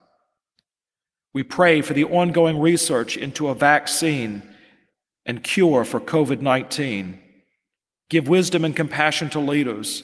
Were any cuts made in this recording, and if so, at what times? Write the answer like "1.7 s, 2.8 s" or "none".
7.9 s